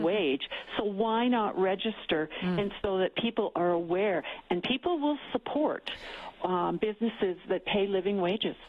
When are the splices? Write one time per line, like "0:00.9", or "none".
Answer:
none